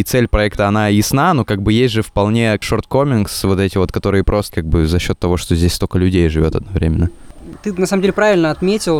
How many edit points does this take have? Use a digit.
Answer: 0